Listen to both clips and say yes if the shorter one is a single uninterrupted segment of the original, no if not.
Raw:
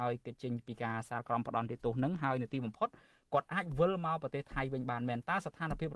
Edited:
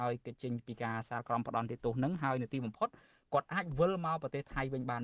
yes